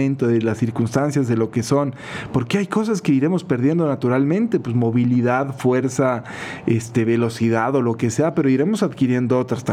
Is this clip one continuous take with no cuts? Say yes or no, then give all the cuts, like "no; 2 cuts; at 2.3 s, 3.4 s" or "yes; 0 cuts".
yes; 0 cuts